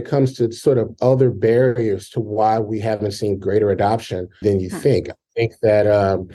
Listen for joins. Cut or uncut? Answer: cut